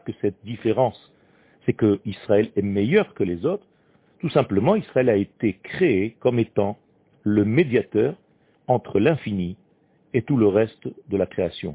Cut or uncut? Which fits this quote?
uncut